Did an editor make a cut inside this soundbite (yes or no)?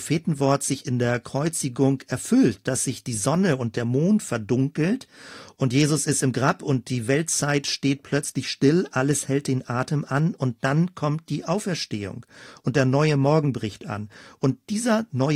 yes